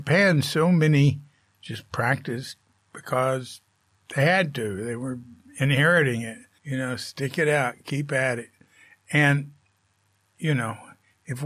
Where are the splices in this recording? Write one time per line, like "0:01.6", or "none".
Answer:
0:06.6